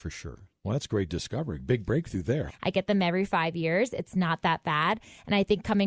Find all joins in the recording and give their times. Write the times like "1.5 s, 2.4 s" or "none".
2.5 s

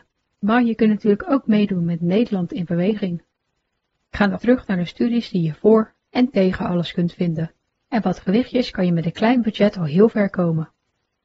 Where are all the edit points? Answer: 4.4 s, 7.9 s

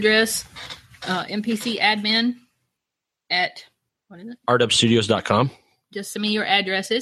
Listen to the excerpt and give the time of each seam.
none

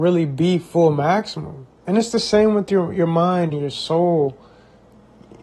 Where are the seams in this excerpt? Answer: 1.8 s, 3.5 s

